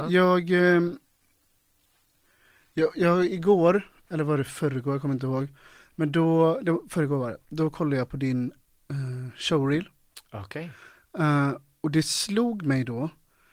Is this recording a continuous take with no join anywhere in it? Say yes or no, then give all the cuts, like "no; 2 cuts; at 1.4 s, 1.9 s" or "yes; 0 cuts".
yes; 0 cuts